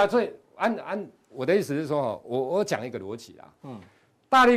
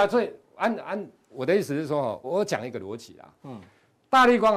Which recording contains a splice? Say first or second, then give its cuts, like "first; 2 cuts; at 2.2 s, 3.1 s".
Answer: second; 1 cut; at 2.2 s